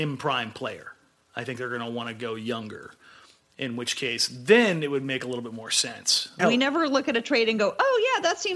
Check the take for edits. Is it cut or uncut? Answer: cut